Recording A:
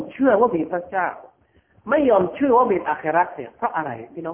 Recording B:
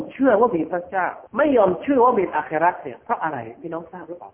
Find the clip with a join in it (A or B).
B